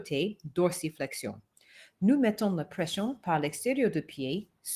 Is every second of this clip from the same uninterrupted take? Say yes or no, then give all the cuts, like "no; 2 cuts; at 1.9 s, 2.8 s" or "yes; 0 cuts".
no; 1 cut; at 2.0 s